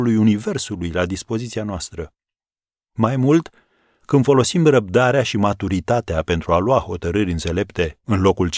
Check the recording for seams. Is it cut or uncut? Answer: uncut